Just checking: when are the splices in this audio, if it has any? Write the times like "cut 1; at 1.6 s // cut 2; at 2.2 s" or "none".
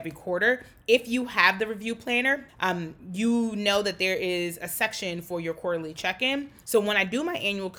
cut 1; at 2.5 s // cut 2; at 6.6 s